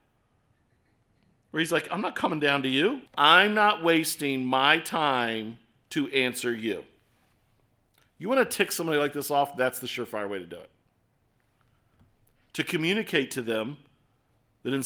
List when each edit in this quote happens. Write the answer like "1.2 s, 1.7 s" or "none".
3.1 s